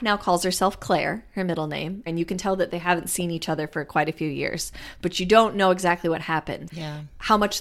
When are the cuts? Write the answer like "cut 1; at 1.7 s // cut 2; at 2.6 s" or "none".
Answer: cut 1; at 2.1 s // cut 2; at 6.7 s